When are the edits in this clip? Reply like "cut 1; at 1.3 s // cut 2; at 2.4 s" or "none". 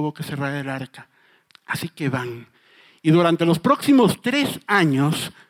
cut 1; at 1.5 s